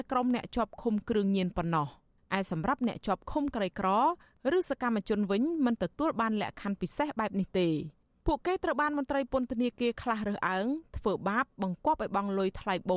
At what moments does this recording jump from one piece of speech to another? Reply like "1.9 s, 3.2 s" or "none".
none